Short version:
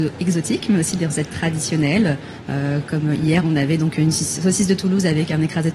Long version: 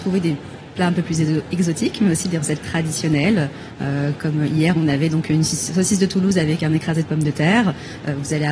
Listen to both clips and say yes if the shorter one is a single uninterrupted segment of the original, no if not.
yes